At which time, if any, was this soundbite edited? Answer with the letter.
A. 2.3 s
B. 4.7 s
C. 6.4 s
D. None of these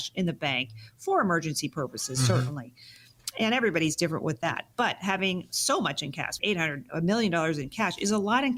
C